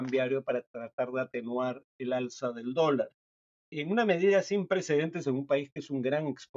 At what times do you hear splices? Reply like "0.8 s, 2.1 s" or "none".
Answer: none